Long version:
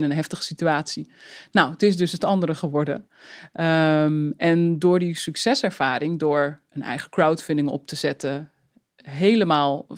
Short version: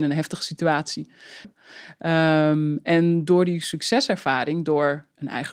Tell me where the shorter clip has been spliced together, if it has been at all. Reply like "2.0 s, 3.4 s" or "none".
1.4 s